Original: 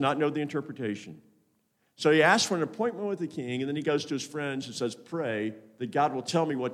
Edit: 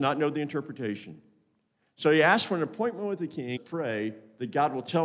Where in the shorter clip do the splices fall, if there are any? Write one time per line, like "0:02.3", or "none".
0:03.6